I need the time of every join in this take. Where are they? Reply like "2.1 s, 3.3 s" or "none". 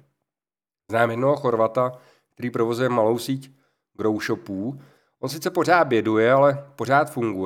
none